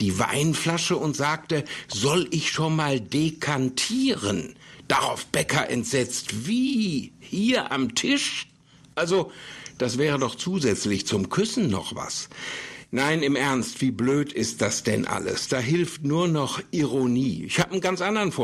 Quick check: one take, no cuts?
yes; 0 cuts

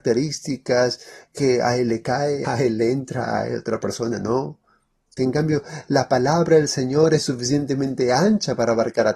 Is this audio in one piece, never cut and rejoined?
no; 2 cuts; at 2.4 s, 5.2 s

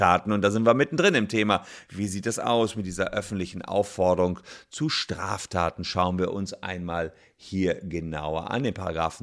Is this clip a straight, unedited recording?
yes; 0 cuts

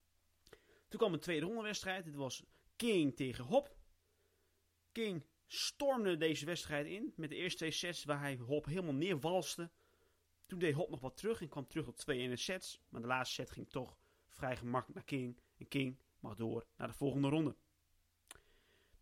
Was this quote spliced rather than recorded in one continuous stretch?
no; 0 cuts

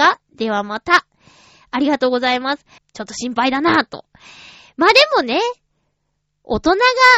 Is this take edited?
yes; 1 cut; at 2.8 s

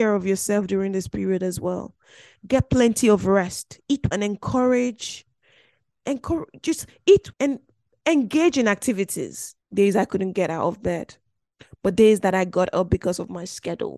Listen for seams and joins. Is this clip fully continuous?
no; 3 cuts; at 4.1 s, 7.3 s, 9.6 s

